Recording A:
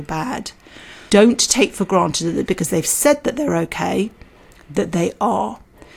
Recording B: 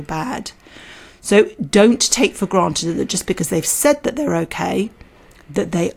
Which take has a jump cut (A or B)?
A